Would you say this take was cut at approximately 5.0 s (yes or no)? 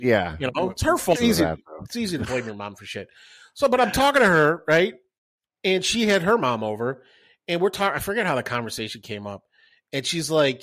no